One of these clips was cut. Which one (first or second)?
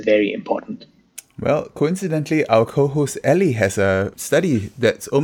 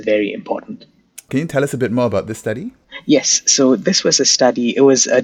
second